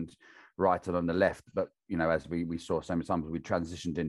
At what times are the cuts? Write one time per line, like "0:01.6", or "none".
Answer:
none